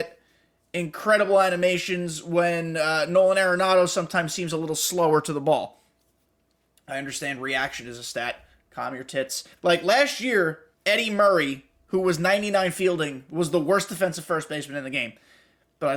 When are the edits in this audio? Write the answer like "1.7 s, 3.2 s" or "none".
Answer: 9.6 s, 10.7 s